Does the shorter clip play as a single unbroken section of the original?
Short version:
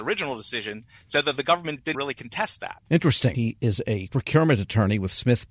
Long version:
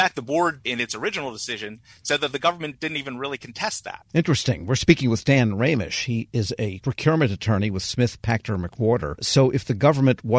no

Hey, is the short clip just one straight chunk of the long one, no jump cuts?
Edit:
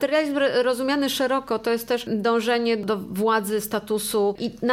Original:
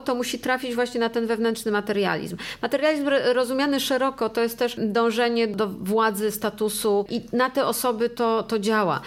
yes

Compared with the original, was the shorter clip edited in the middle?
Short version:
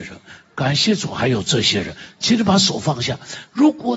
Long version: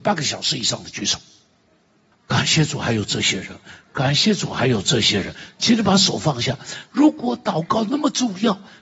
no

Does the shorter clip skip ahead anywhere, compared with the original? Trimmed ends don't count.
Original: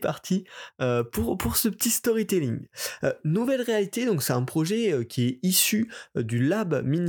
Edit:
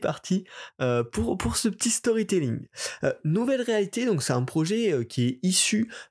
no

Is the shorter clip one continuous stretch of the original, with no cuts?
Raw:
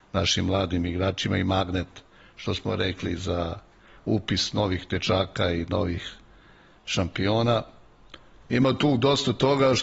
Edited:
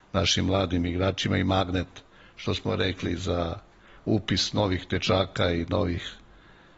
yes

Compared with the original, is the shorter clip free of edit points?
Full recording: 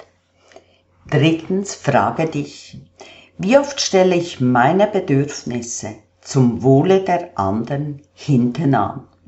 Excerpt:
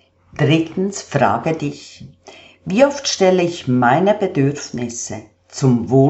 yes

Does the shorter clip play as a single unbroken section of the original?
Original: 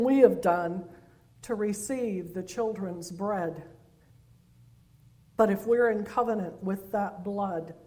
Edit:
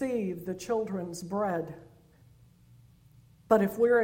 yes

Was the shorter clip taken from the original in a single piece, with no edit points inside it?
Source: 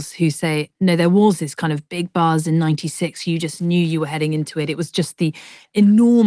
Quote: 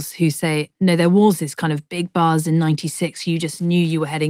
yes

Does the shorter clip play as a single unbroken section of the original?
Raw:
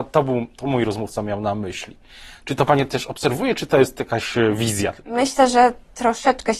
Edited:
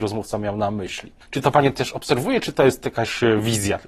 no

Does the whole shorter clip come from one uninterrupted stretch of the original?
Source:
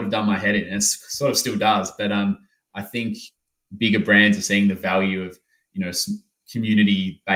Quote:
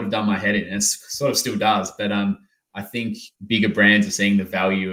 no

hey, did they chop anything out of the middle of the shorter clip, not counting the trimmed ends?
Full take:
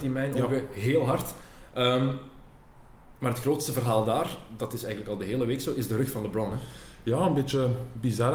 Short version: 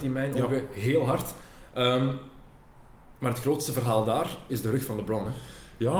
yes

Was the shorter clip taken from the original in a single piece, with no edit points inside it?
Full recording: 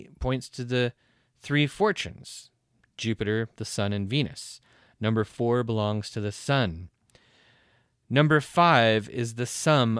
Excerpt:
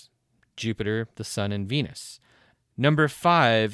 no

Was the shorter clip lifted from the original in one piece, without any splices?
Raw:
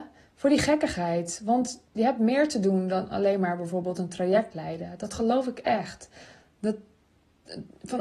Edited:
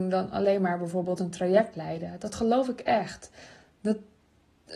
yes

